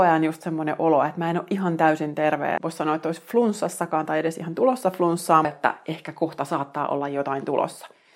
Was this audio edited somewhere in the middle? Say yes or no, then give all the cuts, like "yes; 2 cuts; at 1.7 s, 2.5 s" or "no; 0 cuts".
yes; 2 cuts; at 2.6 s, 5.4 s